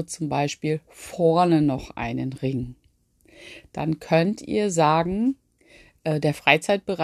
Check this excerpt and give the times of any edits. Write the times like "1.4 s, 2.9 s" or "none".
none